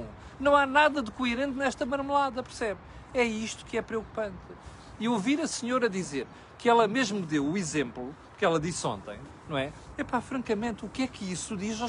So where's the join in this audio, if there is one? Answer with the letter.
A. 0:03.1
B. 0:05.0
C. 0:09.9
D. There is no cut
C